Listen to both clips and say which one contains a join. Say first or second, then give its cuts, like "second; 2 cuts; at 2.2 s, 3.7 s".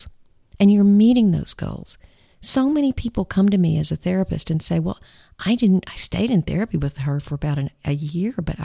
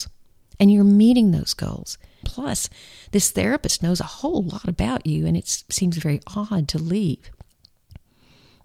second; 1 cut; at 2.2 s